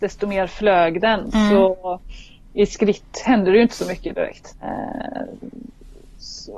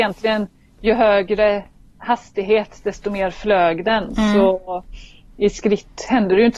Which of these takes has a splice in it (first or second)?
first